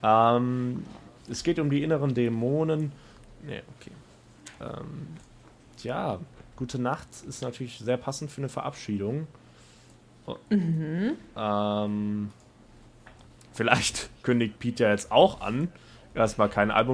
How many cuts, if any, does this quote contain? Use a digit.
0